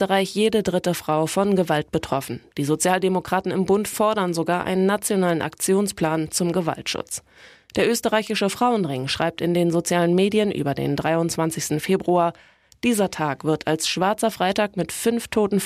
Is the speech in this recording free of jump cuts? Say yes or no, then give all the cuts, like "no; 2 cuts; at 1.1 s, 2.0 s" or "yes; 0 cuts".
yes; 0 cuts